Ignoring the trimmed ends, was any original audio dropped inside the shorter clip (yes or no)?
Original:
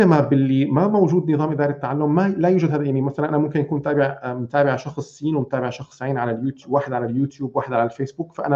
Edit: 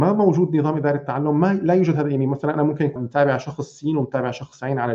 yes